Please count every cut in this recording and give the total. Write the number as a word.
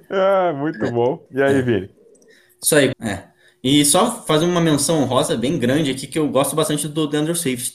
two